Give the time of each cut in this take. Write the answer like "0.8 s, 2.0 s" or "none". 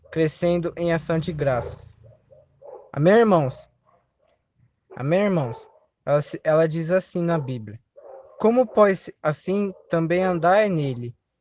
4.9 s, 9.2 s